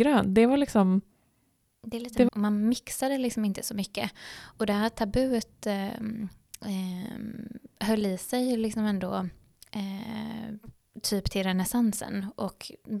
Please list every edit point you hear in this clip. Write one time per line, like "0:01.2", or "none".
0:02.3